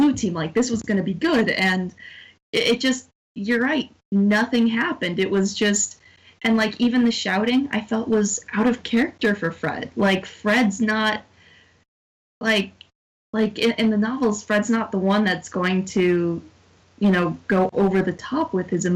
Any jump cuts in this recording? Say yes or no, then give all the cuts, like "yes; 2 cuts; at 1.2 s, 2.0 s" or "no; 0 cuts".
no; 0 cuts